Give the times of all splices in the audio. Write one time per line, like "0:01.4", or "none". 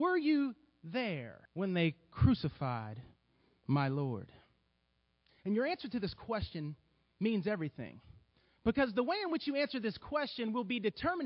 0:01.5
0:05.3